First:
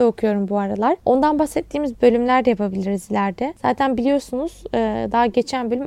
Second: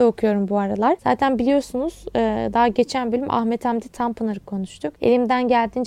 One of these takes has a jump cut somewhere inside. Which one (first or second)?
second